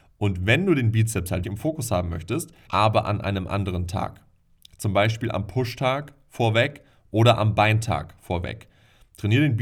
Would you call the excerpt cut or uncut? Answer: cut